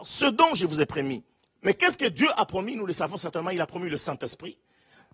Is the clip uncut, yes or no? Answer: no